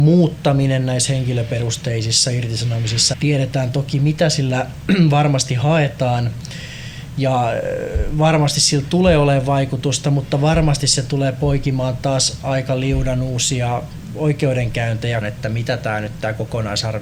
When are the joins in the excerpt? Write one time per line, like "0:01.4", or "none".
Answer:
0:03.1
0:15.2